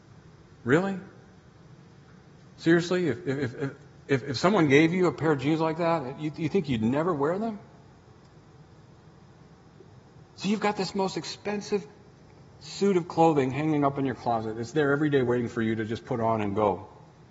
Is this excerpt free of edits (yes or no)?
yes